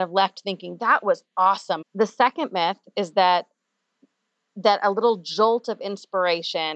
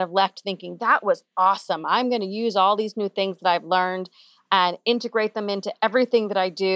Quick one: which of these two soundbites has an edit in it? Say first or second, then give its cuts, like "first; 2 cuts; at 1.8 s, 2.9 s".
first; 1 cut; at 1.8 s